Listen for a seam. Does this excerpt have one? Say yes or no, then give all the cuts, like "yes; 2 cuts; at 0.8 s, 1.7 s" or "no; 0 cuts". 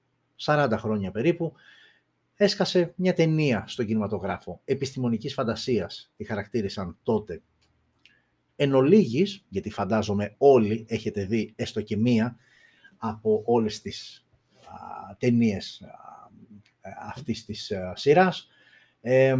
yes; 1 cut; at 8.5 s